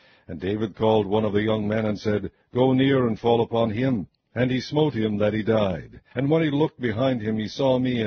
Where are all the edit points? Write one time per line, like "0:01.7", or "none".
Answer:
0:06.1